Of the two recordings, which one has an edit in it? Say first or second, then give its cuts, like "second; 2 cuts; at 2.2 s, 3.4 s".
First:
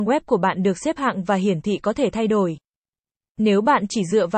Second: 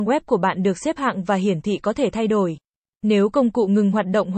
second; 1 cut; at 3.0 s